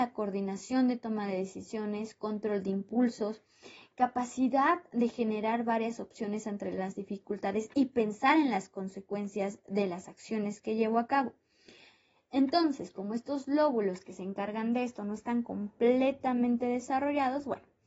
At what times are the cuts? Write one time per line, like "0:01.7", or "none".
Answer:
none